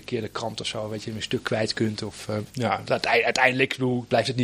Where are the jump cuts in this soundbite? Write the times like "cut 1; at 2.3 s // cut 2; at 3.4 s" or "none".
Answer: cut 1; at 2.5 s